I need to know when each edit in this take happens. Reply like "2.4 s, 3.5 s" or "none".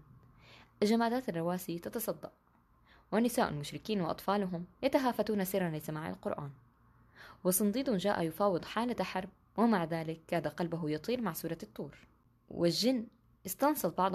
none